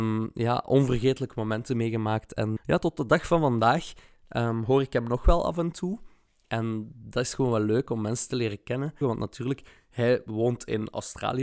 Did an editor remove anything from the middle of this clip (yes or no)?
yes